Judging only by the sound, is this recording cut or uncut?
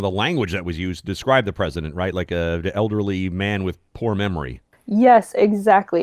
uncut